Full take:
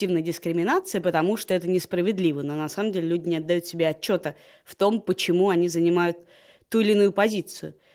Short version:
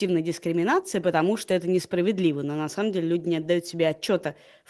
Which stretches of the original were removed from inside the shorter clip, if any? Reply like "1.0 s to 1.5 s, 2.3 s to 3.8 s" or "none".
none

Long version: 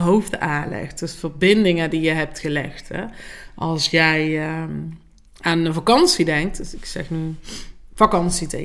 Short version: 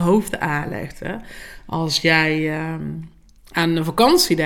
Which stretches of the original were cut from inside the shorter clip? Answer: 0.9 s to 2.8 s

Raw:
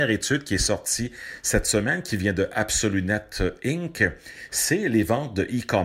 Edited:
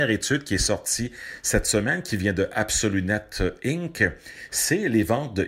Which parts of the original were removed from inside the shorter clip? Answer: none

